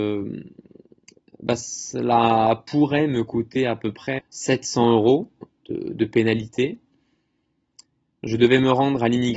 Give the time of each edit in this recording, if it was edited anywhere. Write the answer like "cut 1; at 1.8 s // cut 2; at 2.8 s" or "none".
cut 1; at 4.2 s